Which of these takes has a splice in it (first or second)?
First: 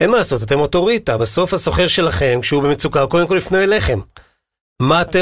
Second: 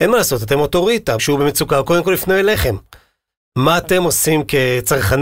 second